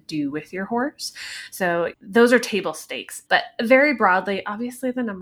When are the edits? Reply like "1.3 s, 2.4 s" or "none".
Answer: 1.9 s, 3.3 s